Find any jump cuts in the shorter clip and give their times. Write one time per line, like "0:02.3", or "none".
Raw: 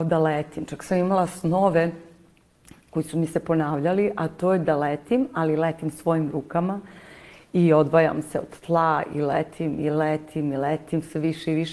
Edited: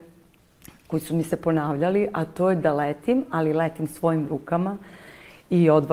none